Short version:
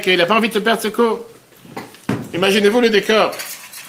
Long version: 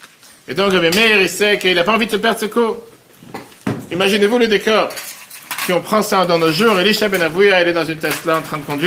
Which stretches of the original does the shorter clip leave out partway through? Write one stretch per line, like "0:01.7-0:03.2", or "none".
none

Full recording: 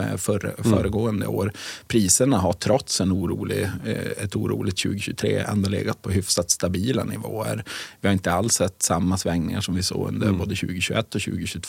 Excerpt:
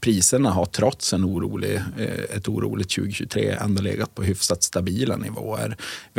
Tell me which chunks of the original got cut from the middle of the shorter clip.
none

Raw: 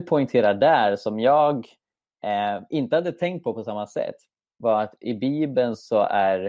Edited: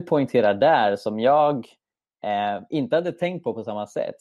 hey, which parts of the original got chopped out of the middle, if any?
none

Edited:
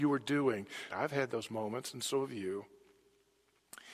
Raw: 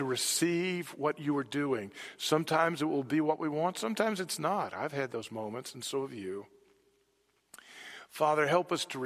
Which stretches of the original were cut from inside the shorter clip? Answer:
0:02.1-0:04.7

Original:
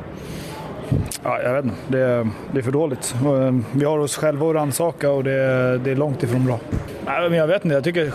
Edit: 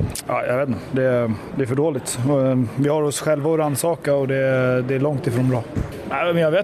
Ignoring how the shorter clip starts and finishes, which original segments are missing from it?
none

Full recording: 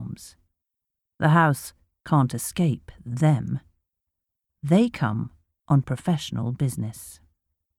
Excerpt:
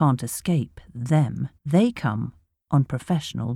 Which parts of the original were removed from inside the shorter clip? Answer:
0:03.7-0:04.5

